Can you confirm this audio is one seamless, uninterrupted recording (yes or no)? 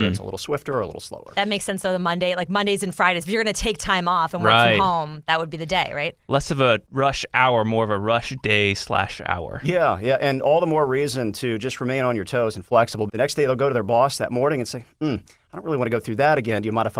no